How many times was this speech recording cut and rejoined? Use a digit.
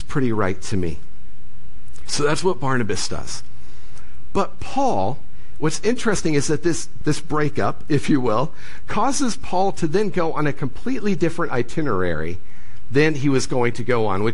1